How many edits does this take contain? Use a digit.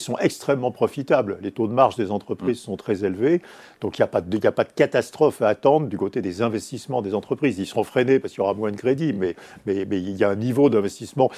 0